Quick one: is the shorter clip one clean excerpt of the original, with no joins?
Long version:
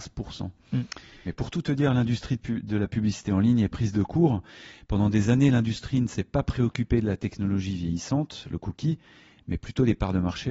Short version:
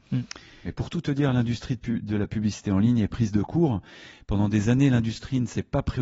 yes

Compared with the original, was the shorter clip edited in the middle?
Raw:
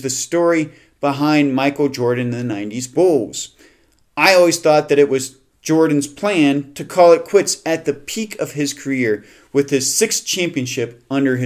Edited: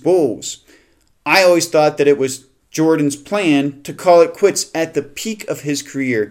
no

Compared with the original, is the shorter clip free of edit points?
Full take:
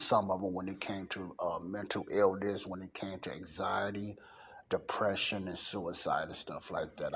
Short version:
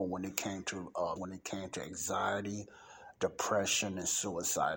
no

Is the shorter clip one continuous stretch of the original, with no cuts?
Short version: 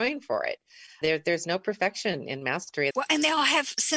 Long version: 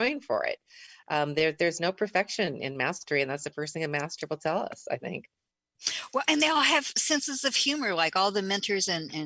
no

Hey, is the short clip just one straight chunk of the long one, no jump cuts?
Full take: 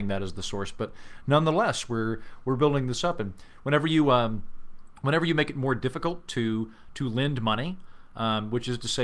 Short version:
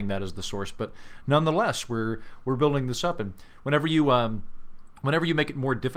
yes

